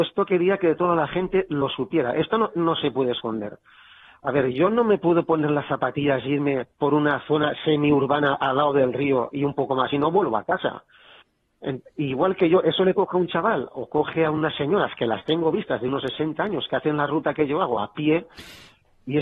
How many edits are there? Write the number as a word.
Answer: one